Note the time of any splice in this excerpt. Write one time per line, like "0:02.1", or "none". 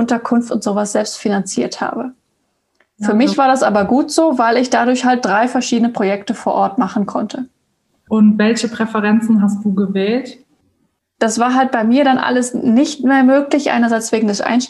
0:11.0

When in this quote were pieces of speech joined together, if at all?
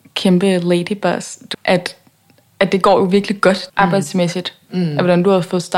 0:01.5
0:03.7

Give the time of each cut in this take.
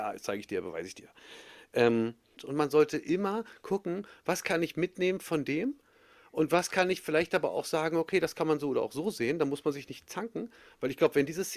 0:02.4

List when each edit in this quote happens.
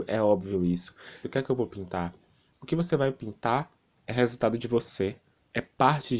0:01.2

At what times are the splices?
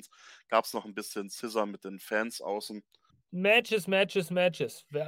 0:03.1

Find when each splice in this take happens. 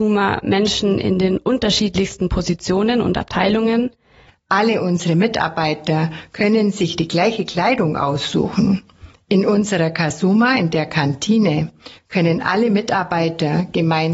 0:04.3
0:09.1

